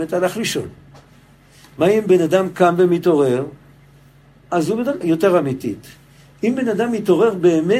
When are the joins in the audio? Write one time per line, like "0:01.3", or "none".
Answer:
0:05.0

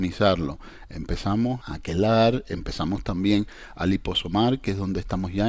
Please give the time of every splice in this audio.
0:01.6

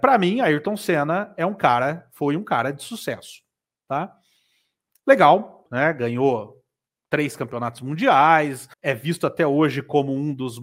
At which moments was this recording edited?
0:05.7
0:08.7

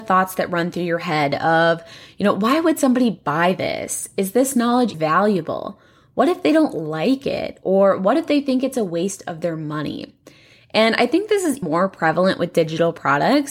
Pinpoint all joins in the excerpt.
0:04.9
0:11.6

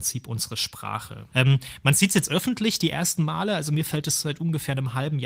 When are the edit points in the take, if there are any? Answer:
0:01.3

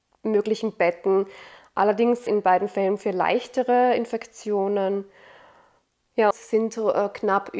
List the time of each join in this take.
0:02.3
0:06.3

